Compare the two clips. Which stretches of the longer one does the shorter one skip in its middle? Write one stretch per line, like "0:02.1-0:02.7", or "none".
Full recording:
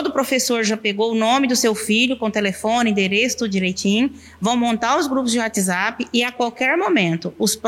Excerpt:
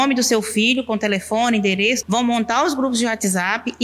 0:03.4-0:04.4